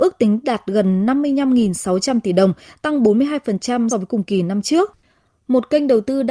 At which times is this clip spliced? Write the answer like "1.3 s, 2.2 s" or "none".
3.9 s